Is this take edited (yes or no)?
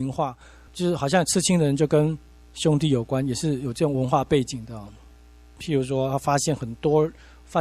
yes